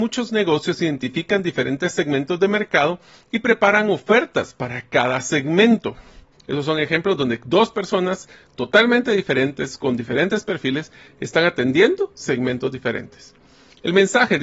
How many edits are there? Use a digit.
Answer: 1